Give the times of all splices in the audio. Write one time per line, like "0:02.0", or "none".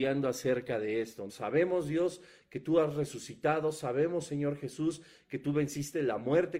0:01.3